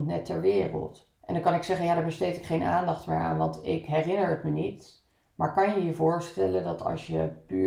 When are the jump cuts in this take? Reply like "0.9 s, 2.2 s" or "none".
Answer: 1.2 s